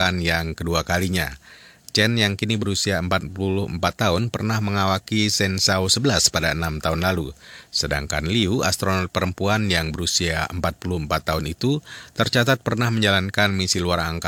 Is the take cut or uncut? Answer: uncut